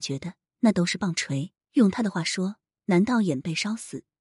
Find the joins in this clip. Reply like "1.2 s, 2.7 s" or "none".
1.6 s